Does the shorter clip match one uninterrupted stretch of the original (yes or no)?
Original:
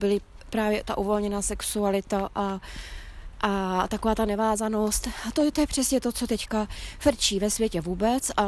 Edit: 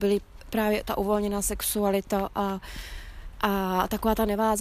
yes